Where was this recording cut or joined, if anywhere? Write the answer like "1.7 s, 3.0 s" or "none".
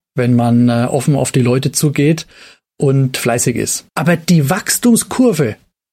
3.9 s